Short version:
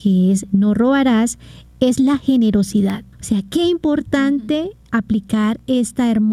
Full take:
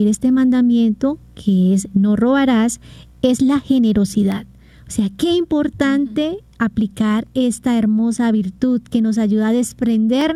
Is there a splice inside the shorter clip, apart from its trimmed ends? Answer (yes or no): yes